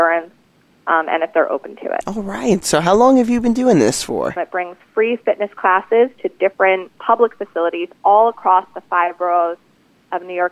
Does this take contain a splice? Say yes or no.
yes